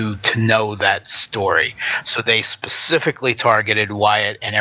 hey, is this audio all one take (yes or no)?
yes